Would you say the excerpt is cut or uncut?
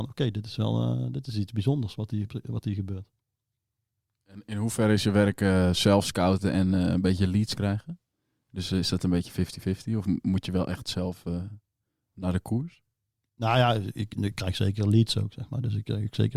uncut